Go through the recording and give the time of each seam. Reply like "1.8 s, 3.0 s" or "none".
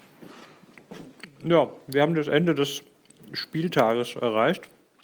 none